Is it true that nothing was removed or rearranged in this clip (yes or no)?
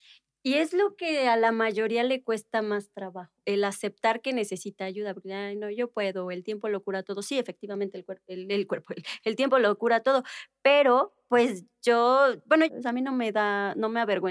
no